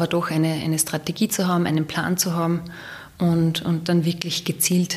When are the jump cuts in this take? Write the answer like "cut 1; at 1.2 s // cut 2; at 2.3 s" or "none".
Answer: none